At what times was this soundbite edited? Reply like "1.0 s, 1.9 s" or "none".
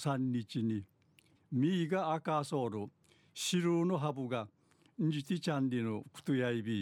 1.3 s